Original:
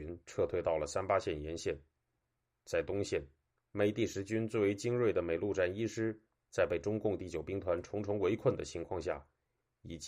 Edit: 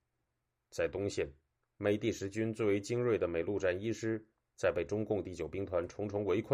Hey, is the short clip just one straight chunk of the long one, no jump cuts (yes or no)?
yes